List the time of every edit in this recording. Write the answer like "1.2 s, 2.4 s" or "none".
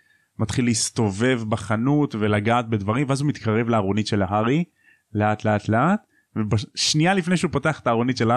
5.6 s